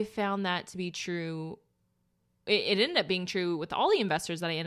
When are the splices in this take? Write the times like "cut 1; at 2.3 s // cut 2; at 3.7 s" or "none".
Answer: none